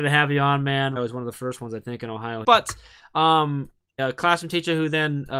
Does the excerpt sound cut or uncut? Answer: cut